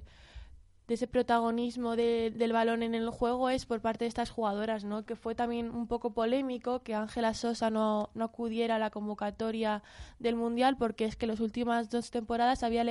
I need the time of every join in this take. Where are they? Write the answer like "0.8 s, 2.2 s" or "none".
5.1 s